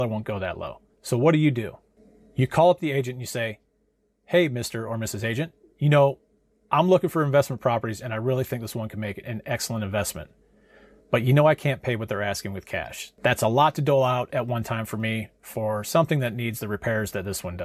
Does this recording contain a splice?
no; 0 cuts

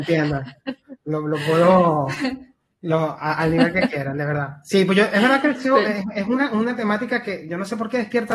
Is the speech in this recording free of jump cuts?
no; 1 cut; at 1.0 s

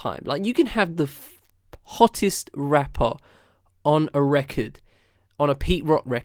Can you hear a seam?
no; 0 cuts

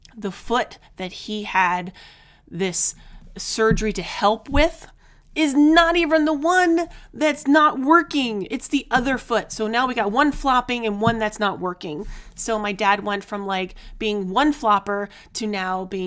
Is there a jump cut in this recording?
no; 0 cuts

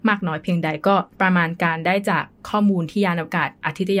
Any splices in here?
yes; 1 cut; at 1.1 s

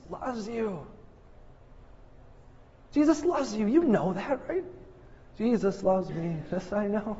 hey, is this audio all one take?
yes; 0 cuts

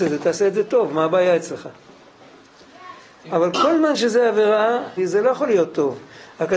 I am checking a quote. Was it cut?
yes; 2 cuts; at 3.3 s, 5.0 s

